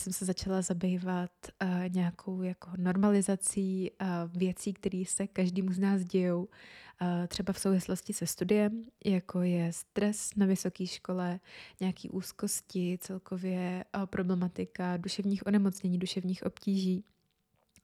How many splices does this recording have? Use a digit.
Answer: 0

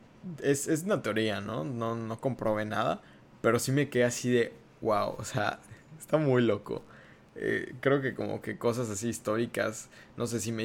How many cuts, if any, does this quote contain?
0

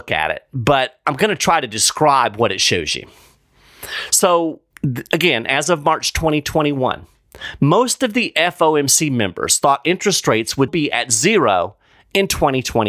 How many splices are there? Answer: 2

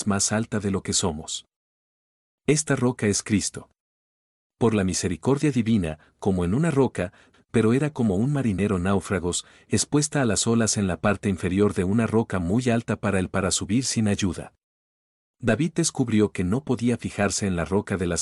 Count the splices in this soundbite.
1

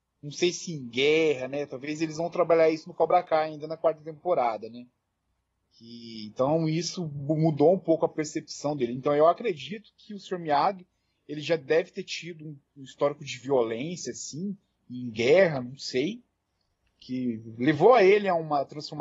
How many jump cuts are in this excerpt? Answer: 0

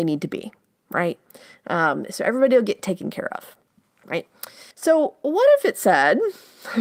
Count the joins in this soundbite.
1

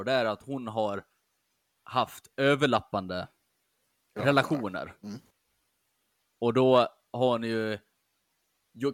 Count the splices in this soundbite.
1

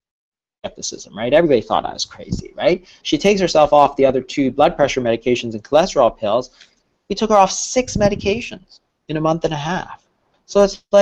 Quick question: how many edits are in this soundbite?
1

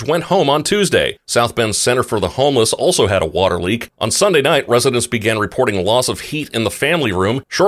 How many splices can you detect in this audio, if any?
1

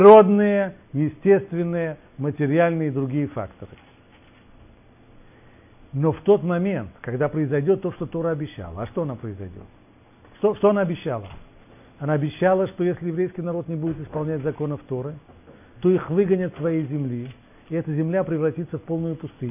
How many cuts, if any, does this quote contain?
0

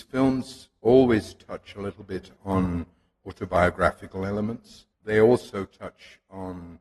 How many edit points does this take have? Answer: 1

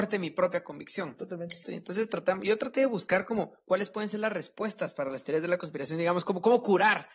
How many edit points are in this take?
1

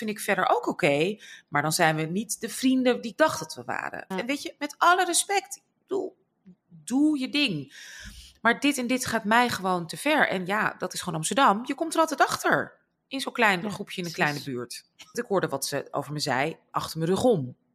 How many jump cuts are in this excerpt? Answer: 2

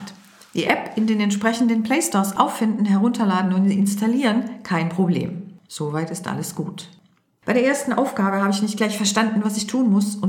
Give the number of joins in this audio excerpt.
1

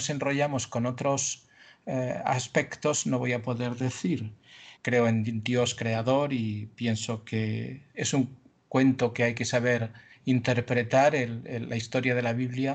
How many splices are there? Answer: 2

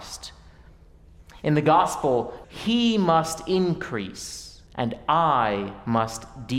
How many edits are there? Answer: 2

